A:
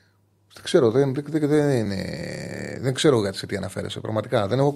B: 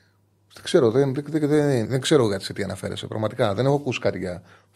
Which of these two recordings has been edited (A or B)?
B